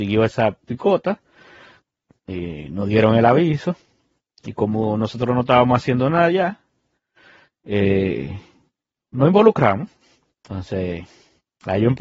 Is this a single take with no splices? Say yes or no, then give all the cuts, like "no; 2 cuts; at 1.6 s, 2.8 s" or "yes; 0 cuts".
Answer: yes; 0 cuts